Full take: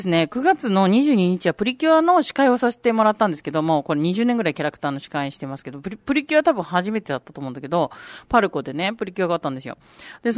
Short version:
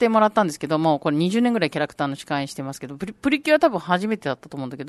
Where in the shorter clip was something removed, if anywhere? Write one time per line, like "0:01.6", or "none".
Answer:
none